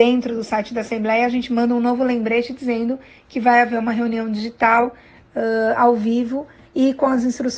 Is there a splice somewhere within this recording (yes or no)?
no